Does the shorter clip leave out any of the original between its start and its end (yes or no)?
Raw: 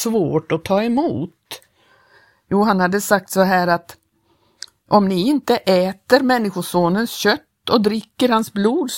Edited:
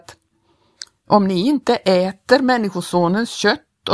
no